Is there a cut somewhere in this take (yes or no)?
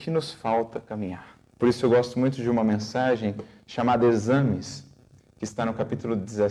yes